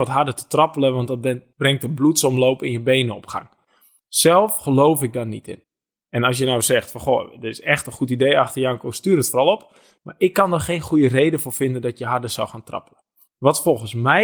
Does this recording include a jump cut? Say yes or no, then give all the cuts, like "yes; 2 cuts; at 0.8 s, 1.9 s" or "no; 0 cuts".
no; 0 cuts